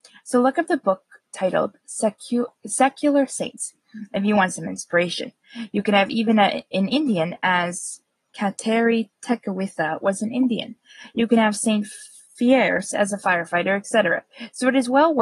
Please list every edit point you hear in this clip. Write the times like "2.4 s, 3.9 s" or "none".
none